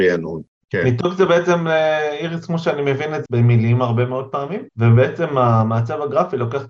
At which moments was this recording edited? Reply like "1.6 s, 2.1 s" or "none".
3.3 s, 4.7 s